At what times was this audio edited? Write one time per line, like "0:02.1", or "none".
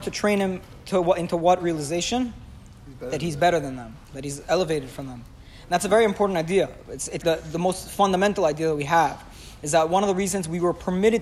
0:07.2